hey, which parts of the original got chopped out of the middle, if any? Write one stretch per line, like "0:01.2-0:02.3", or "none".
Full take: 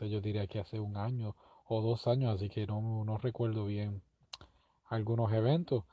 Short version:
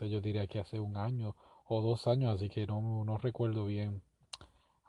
none